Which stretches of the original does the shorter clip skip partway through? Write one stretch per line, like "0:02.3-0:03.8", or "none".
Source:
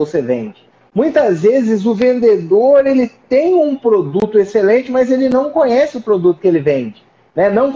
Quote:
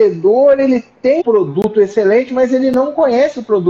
0:03.5-0:03.8